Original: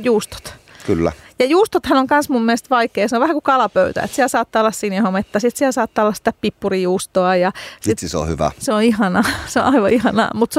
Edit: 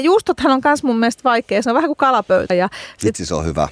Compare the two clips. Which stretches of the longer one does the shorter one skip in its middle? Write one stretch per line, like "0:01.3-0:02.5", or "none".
0:04.0-0:07.3

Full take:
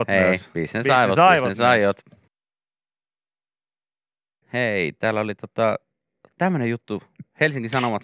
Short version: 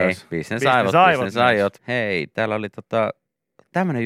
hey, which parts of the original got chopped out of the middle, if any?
0:02.0-0:04.4

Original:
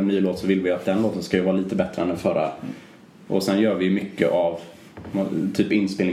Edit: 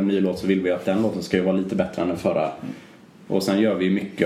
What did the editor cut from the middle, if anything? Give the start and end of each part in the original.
none

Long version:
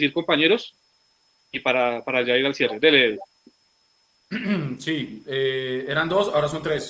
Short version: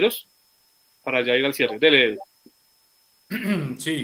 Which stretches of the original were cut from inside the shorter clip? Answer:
0:01.5-0:02.0

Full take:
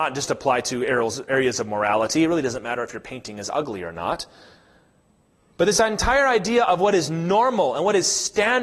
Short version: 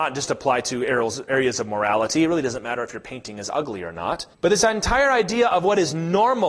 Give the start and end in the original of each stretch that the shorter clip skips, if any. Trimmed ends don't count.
0:04.3-0:05.5

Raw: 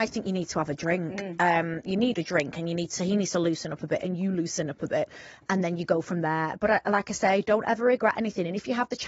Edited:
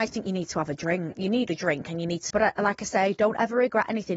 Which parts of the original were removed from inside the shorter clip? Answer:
0:01.1-0:01.8
0:03.0-0:06.6

